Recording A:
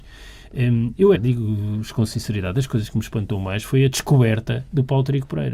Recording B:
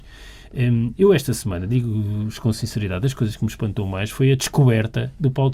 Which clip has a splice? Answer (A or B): A